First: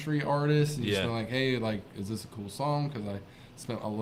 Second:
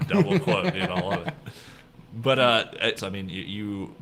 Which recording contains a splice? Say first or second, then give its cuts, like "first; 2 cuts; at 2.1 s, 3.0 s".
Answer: second; 1 cut; at 3.0 s